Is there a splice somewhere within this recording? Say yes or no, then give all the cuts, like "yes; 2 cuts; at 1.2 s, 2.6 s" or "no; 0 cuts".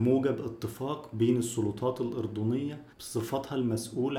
yes; 1 cut; at 2.9 s